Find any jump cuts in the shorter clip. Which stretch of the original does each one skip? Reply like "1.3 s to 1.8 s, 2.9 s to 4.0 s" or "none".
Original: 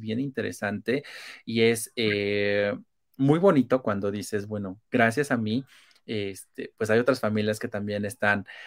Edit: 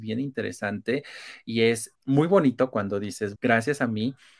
1.9 s to 3.1 s, 4.5 s to 4.9 s